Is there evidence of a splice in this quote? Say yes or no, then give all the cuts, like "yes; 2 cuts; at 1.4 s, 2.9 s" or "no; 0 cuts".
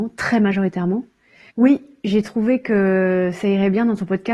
yes; 1 cut; at 1.5 s